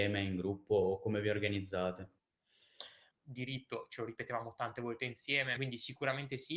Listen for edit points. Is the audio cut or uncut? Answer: cut